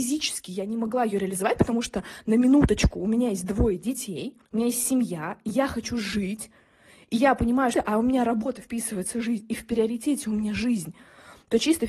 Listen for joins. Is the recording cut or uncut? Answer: cut